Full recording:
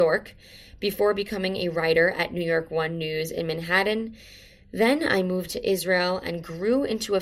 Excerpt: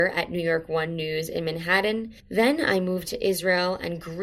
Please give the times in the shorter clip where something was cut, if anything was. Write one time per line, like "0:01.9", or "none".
0:02.2

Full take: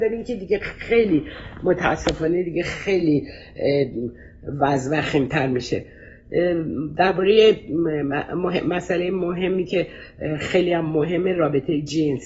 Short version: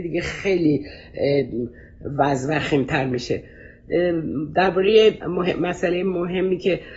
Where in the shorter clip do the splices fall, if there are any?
0:05.2

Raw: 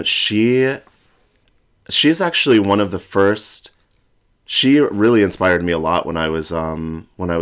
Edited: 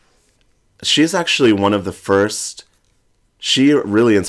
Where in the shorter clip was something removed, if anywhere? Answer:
none

